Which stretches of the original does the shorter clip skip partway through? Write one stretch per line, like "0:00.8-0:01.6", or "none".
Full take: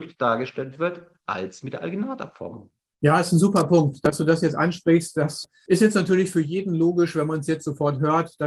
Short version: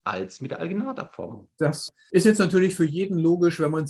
0:02.8-0:05.1